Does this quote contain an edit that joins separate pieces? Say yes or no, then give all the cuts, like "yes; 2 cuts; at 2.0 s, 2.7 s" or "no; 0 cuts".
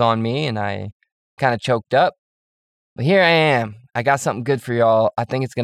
no; 0 cuts